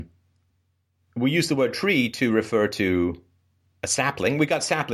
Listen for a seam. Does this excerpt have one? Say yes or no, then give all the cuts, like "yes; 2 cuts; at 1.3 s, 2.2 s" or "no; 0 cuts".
no; 0 cuts